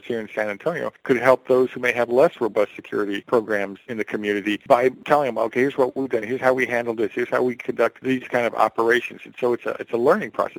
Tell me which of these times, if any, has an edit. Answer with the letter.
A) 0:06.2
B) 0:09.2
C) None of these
A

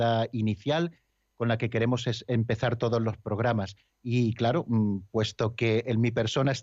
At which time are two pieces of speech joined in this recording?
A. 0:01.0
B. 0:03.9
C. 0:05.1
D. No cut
B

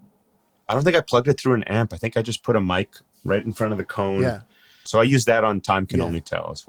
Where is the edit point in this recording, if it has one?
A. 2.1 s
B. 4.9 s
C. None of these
B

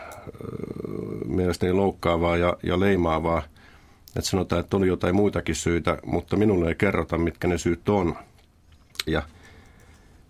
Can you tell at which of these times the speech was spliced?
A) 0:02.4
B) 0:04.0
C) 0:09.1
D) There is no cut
C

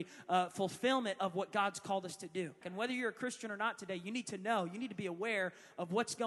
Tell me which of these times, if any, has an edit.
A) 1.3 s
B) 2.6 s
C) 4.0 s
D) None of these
B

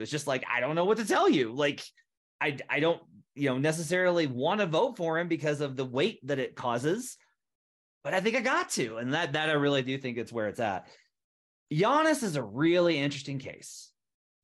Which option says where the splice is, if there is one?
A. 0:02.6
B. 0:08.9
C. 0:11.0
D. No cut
D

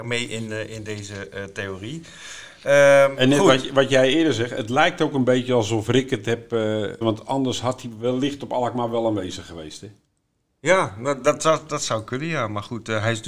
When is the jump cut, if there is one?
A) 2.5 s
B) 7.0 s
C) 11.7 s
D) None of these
B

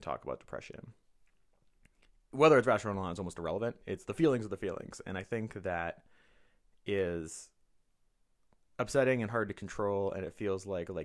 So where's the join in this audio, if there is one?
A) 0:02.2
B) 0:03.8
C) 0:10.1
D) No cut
D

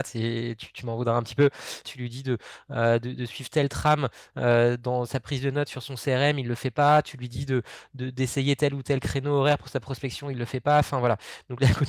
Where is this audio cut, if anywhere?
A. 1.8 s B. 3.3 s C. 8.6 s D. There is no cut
A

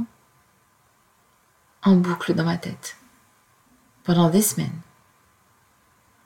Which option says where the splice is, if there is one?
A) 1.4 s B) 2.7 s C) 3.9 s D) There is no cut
D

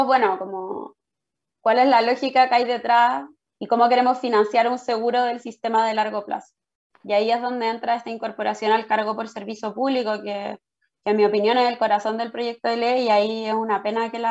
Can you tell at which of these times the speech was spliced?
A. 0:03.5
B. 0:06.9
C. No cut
A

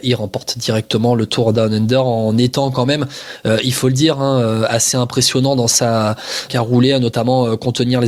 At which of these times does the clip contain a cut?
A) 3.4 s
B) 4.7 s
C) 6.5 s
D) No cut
C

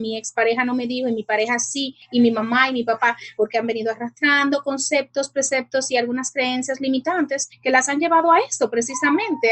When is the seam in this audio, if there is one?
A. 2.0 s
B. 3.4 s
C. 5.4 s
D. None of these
B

